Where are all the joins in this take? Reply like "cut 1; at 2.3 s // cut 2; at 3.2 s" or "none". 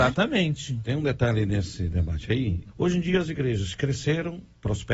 cut 1; at 2.7 s